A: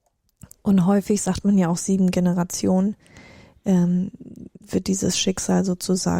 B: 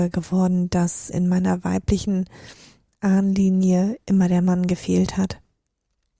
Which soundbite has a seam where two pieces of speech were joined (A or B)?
B